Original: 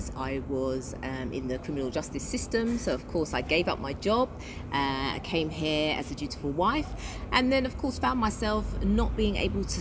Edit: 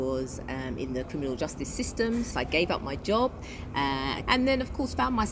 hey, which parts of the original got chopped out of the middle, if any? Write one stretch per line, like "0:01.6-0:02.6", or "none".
0:02.9-0:03.3
0:05.2-0:07.3